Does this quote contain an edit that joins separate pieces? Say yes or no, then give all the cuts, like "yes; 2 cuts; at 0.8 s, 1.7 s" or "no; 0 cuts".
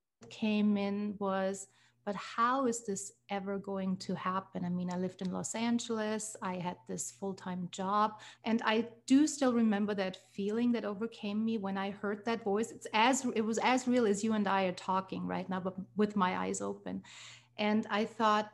yes; 1 cut; at 8.4 s